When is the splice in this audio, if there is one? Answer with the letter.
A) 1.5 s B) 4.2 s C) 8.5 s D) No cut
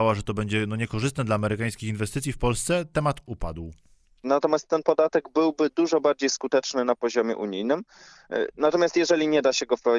B